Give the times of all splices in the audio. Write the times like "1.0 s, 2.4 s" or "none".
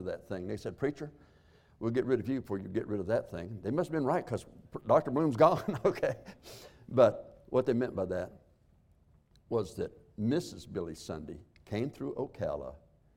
none